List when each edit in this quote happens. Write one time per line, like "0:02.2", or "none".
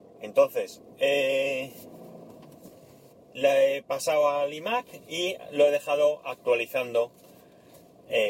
0:03.1

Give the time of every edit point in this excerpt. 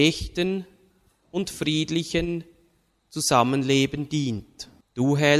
none

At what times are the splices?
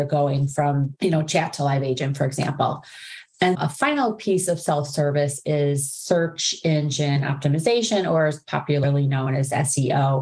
0:03.5

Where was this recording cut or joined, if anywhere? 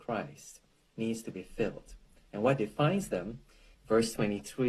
0:03.7

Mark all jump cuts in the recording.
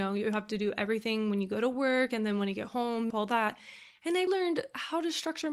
0:03.1
0:04.3

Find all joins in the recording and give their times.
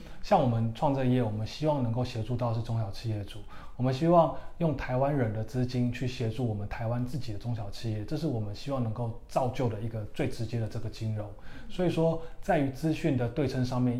none

